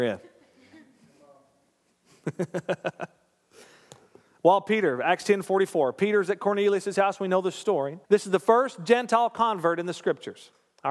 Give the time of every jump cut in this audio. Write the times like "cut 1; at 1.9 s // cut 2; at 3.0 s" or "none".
cut 1; at 8.0 s